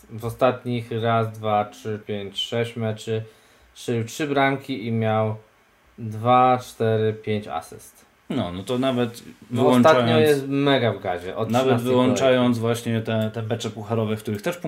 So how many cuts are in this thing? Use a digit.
1